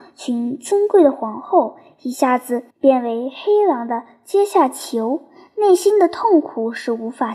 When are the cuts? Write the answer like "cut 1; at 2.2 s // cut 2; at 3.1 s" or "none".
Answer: cut 1; at 2.7 s